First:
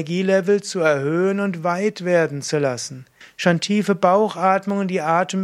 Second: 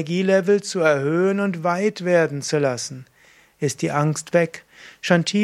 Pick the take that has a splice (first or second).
first